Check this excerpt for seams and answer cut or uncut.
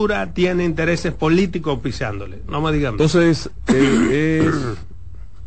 uncut